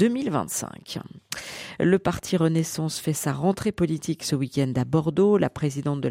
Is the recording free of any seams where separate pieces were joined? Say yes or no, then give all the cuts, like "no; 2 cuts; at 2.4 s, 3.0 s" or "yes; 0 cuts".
yes; 0 cuts